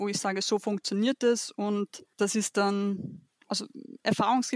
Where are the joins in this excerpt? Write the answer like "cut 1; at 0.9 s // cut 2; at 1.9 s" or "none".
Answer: cut 1; at 2.1 s